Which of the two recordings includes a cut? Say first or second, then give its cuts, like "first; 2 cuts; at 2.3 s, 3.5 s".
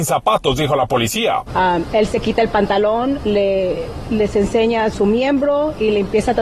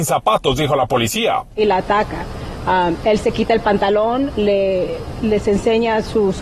first; 2 cuts; at 1.5 s, 4.9 s